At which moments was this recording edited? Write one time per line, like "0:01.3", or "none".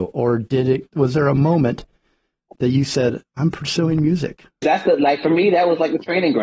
0:04.6